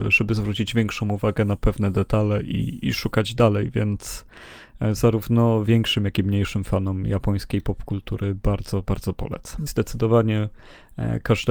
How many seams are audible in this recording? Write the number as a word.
one